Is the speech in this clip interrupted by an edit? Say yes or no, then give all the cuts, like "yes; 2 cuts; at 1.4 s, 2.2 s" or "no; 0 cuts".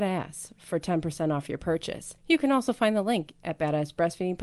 yes; 1 cut; at 2.2 s